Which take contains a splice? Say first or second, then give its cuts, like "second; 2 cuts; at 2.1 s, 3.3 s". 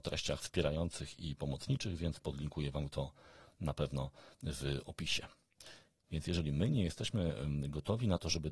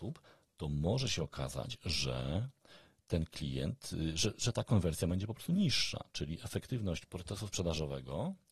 first; 1 cut; at 6.0 s